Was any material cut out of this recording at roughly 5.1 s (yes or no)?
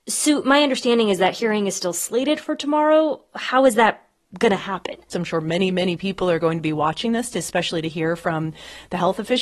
yes